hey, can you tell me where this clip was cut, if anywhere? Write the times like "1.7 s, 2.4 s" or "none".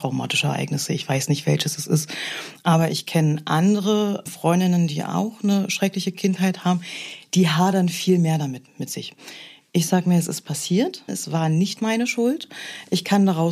11.1 s